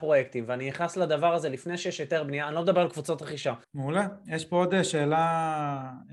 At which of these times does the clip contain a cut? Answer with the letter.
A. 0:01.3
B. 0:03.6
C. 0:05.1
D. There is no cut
B